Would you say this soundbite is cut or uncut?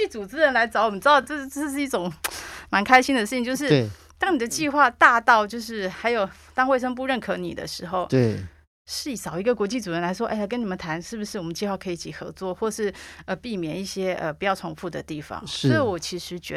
uncut